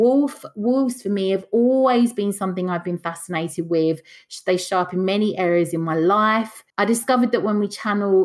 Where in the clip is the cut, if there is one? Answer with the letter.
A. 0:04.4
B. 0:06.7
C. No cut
B